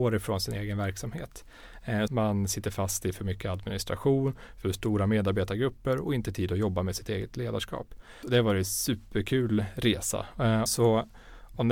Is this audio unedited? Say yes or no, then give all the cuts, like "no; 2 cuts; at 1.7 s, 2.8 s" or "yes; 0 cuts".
no; 3 cuts; at 2.1 s, 8.2 s, 10.7 s